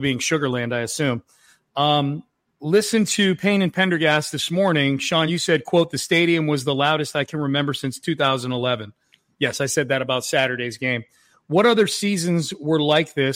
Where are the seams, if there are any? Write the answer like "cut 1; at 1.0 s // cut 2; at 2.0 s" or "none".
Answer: none

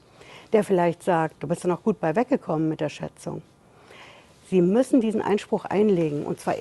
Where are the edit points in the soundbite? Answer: cut 1; at 1.4 s

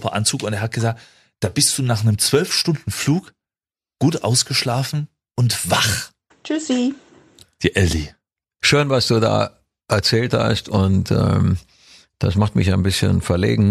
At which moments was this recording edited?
cut 1; at 6.3 s // cut 2; at 8.6 s

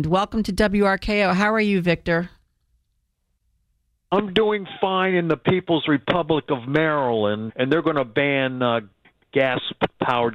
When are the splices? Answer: cut 1; at 7.5 s

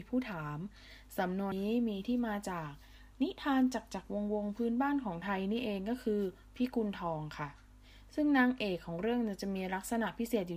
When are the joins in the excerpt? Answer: cut 1; at 1.5 s

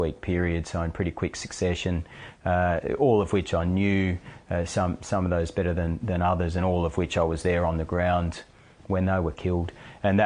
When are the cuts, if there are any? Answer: none

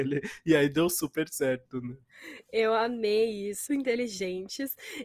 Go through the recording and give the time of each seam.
cut 1; at 3.7 s

